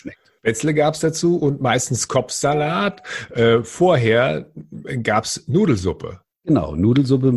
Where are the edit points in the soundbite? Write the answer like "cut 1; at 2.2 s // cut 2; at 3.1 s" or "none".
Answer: none